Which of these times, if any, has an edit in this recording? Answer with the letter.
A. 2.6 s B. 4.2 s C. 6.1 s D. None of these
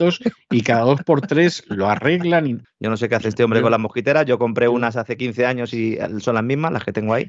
A